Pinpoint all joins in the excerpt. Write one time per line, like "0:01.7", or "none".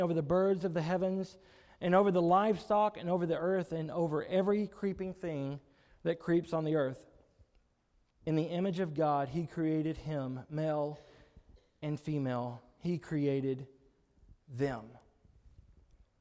0:08.1

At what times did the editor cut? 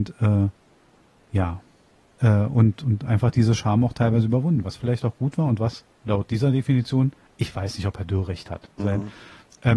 0:08.8

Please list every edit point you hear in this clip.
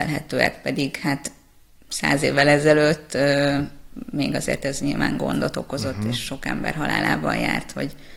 none

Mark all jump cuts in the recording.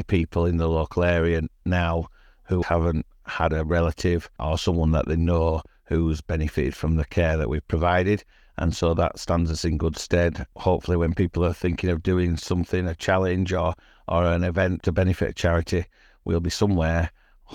0:02.6

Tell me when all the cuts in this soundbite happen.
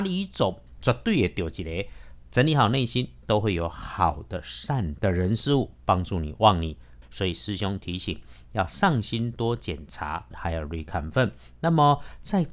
0:07.0
0:10.3

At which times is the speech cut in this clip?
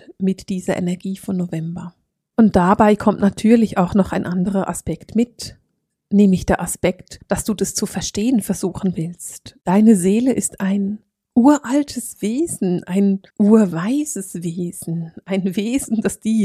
0:09.6
0:13.3

